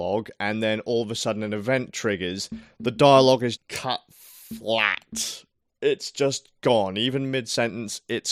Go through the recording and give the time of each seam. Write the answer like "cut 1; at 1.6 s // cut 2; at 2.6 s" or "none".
cut 1; at 3.6 s